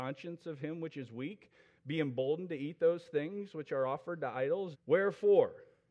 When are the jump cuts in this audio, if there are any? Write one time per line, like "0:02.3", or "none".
0:04.7